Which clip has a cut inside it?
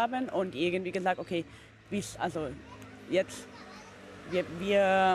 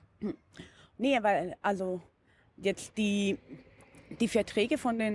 second; 1 cut; at 0.9 s

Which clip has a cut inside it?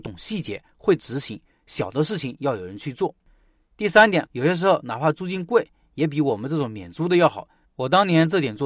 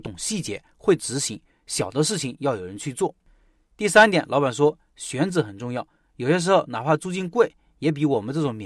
first; 2 cuts; at 4.3 s, 7.6 s

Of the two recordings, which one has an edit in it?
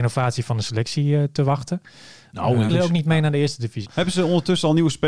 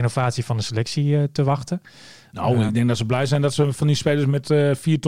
first; 2 cuts; at 2.7 s, 3.8 s

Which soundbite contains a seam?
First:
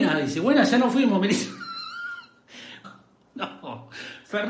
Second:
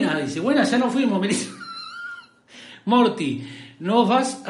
first; 1 cut; at 2.8 s

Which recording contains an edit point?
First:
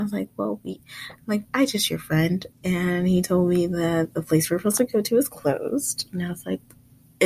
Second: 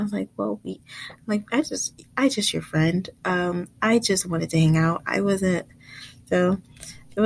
first; 2 cuts; at 1.5 s, 2.5 s

